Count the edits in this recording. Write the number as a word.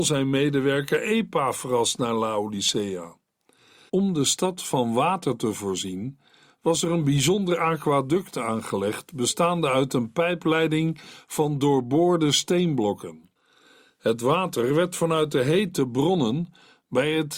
one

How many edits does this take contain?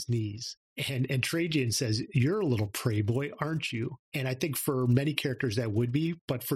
one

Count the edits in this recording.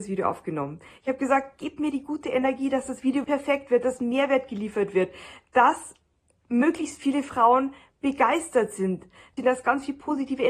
two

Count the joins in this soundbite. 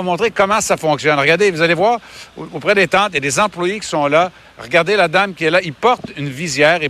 zero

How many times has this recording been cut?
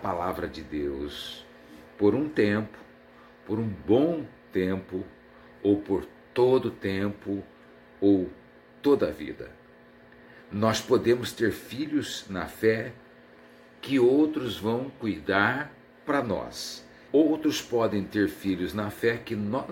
one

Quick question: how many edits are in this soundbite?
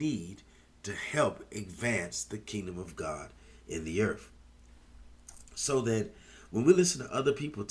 zero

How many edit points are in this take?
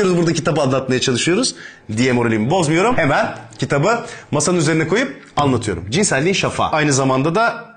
zero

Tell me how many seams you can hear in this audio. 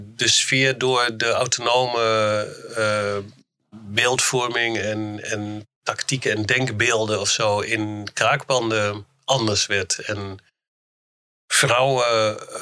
zero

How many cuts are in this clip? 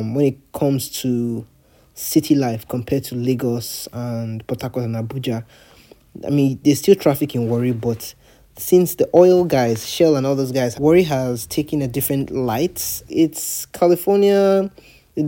two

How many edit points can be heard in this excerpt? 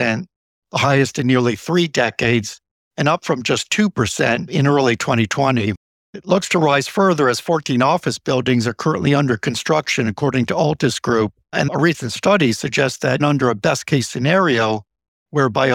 two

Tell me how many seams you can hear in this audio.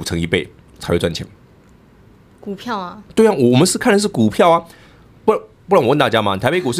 zero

